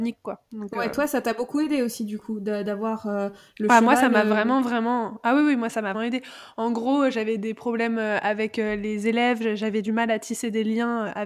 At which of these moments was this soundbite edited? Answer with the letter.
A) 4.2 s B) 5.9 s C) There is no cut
B